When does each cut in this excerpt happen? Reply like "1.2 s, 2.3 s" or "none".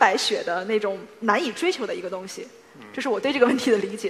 none